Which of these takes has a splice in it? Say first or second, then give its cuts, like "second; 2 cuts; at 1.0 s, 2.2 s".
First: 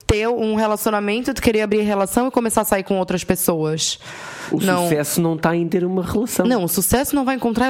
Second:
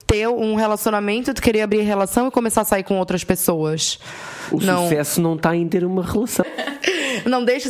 second; 1 cut; at 6.4 s